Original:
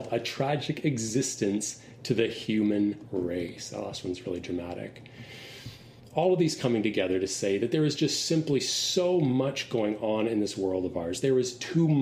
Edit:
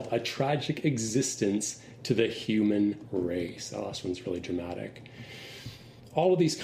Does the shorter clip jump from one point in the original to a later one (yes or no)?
no